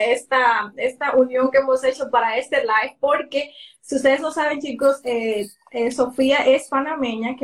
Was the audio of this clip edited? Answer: no; 0 cuts

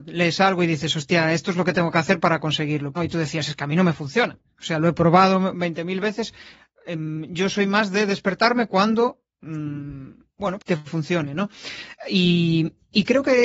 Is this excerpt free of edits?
no; 2 cuts; at 3.0 s, 10.6 s

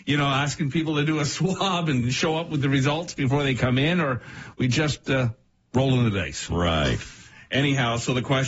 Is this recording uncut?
no; 1 cut; at 6.5 s

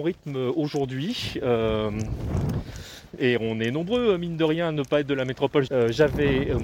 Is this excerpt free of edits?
no; 2 cuts; at 3.1 s, 5.7 s

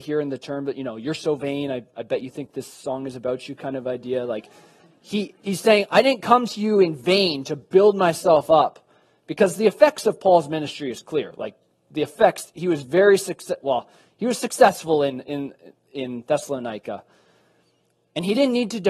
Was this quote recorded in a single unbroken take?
yes; 0 cuts

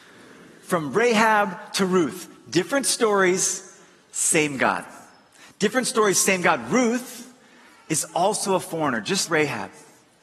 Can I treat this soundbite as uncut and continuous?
no; 1 cut; at 9.3 s

